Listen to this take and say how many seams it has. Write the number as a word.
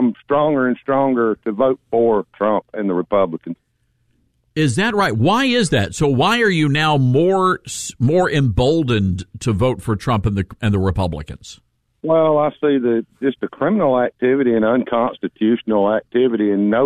zero